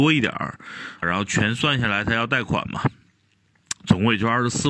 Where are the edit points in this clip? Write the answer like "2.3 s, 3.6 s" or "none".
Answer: 1.0 s